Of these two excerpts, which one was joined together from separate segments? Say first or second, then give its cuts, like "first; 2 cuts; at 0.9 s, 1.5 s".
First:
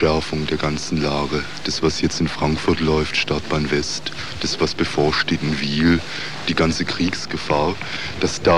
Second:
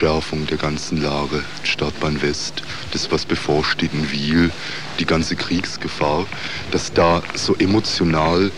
second; 1 cut; at 1.6 s